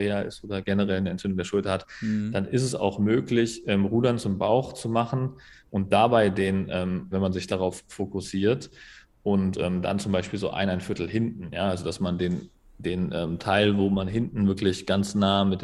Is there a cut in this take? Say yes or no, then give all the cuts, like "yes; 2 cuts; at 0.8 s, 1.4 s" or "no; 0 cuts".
yes; 1 cut; at 7.1 s